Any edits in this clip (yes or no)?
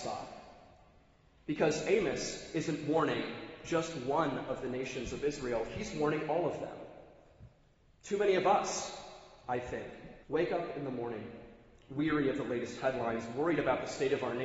yes